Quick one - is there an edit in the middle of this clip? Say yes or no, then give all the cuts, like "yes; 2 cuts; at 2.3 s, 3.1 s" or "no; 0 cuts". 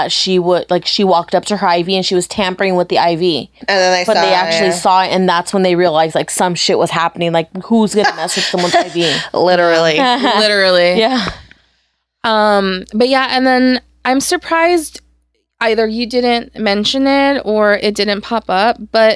yes; 1 cut; at 3.6 s